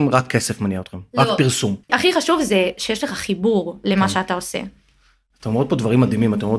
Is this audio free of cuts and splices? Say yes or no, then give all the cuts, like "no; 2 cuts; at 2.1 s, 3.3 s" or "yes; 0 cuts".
no; 1 cut; at 1.9 s